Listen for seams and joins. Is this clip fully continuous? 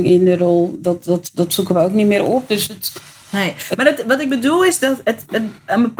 yes; 0 cuts

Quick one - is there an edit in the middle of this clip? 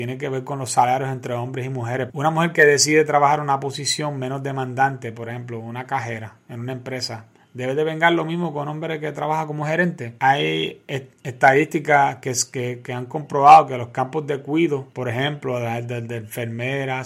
yes; 1 cut; at 2.1 s

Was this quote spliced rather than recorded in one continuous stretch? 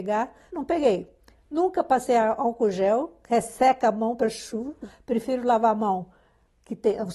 no; 0 cuts

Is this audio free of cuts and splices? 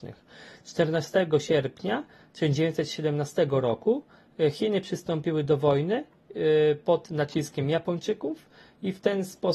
yes; 0 cuts

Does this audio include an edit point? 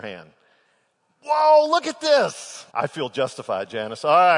yes; 1 cut; at 2.7 s

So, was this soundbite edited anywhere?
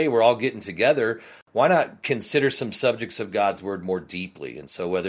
no; 0 cuts

